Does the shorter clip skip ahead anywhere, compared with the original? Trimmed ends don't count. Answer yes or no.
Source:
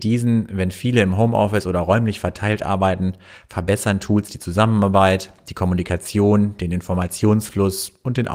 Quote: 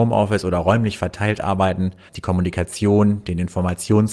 yes